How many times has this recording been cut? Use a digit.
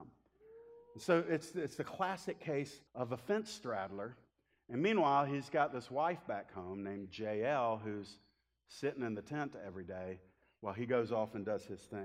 1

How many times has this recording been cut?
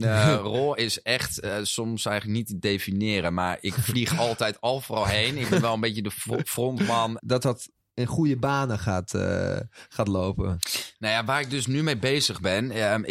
1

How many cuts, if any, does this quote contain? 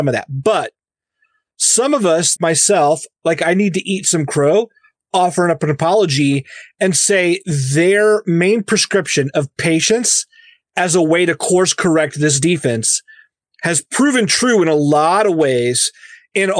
1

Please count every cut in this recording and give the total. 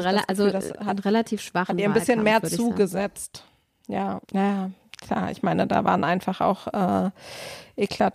1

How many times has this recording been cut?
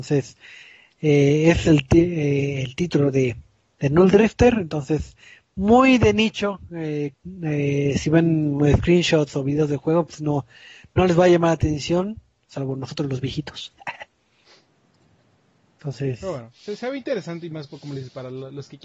1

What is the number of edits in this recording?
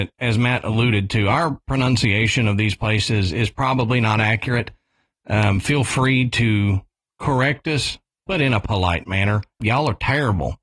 1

